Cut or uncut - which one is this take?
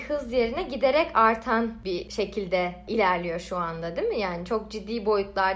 uncut